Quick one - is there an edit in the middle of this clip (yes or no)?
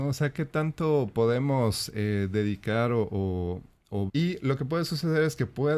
yes